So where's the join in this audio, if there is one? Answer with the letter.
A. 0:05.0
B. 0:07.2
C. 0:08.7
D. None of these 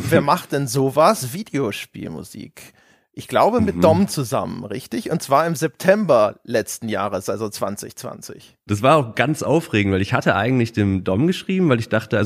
C